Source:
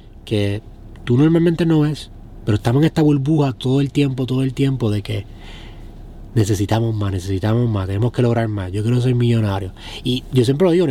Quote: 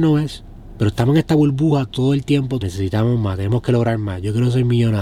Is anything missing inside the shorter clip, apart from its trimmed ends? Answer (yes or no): yes